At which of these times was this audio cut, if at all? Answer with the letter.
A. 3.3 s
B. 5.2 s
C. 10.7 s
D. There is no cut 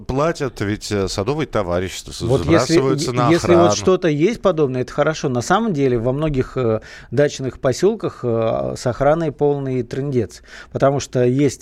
D